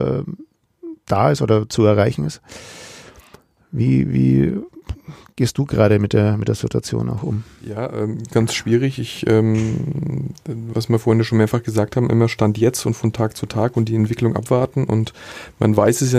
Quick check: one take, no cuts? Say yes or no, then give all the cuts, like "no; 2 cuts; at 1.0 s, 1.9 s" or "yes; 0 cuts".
no; 1 cut; at 8.3 s